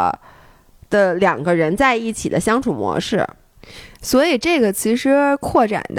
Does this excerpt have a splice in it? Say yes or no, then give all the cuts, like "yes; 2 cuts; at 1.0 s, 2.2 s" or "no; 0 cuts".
no; 0 cuts